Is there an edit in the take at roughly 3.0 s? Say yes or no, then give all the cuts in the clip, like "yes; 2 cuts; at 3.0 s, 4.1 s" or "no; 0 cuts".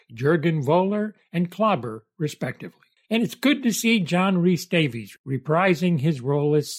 yes; 1 cut; at 3.0 s